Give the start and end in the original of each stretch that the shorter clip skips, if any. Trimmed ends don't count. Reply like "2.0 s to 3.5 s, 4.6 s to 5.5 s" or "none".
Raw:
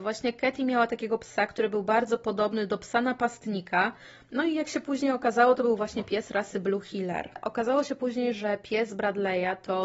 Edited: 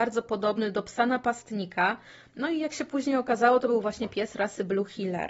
none